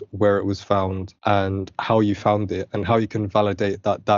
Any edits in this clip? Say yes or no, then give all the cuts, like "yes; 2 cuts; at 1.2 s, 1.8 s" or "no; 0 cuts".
no; 0 cuts